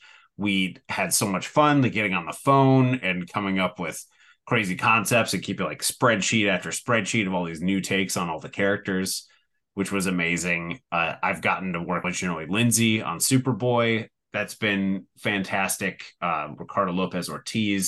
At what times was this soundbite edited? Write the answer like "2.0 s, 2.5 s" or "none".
12.0 s, 16.6 s